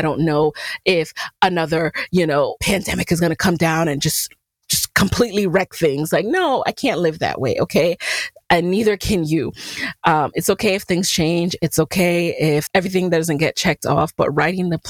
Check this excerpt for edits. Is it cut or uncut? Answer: uncut